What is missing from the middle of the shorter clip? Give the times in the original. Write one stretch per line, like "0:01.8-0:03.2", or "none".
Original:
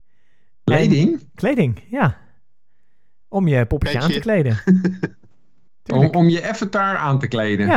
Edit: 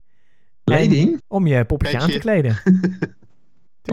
0:01.2-0:03.2